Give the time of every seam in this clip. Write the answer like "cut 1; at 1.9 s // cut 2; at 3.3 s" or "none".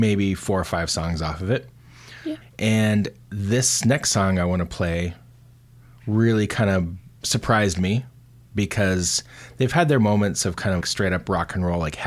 cut 1; at 2.4 s // cut 2; at 7.2 s // cut 3; at 10.8 s